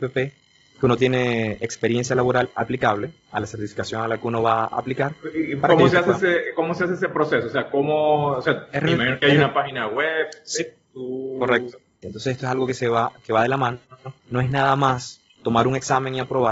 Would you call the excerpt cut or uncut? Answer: cut